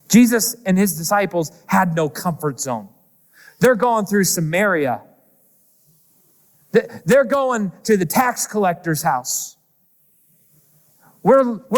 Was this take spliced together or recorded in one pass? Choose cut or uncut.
uncut